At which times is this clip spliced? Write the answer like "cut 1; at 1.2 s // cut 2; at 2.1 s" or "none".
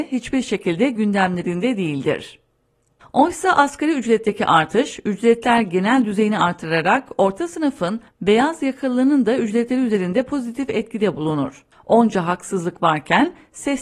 cut 1; at 11.7 s